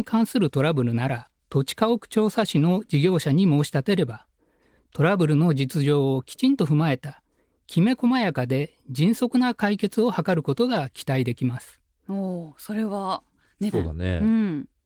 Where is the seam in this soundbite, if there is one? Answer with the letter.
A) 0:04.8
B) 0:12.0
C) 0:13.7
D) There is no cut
C